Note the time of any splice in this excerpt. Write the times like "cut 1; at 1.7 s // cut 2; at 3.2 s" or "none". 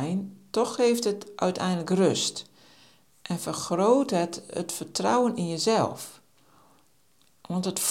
none